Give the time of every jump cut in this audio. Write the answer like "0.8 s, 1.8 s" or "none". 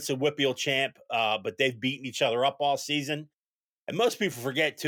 3.7 s